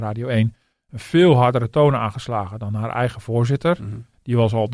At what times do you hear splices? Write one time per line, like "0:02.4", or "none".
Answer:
none